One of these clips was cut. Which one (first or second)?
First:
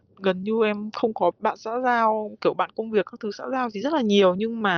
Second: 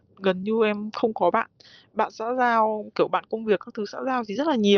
first